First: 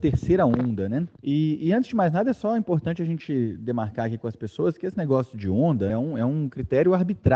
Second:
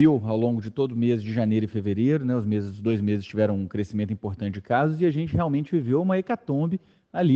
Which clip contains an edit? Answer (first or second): first